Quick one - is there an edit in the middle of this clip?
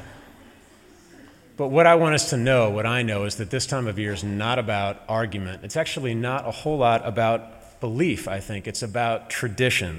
no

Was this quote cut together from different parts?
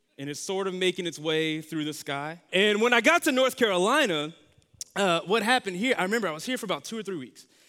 yes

